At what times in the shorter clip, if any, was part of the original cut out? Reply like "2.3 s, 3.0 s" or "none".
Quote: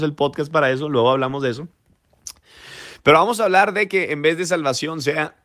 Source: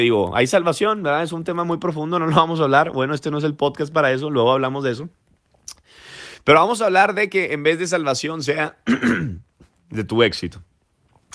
none